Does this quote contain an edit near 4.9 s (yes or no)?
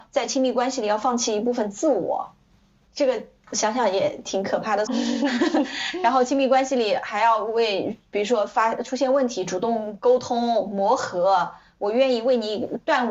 yes